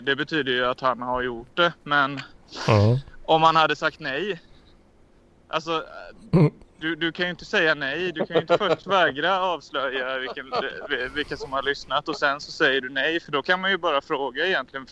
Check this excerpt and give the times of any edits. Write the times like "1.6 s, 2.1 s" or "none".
none